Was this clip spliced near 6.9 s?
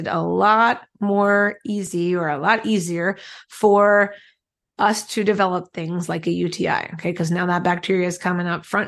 no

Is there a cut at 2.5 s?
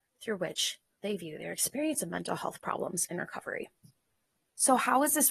no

